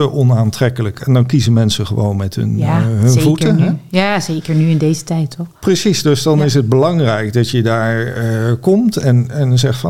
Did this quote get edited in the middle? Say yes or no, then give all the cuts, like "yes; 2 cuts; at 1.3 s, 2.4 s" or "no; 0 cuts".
no; 0 cuts